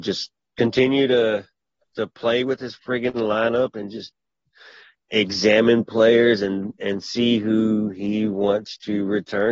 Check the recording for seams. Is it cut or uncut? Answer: uncut